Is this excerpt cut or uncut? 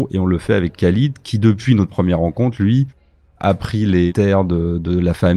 uncut